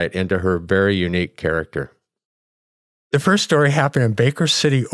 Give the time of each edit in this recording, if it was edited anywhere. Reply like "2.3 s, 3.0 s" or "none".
none